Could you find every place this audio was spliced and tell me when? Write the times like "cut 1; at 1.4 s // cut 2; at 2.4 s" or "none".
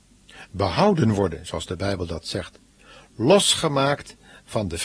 none